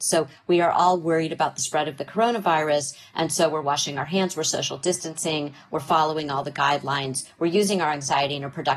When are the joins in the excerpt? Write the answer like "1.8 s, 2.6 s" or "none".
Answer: none